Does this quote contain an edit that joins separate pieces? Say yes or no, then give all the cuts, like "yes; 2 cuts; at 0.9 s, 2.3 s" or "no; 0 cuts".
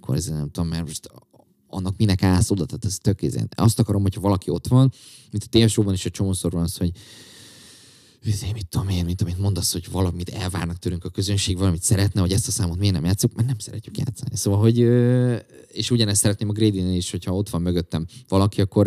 yes; 1 cut; at 14.3 s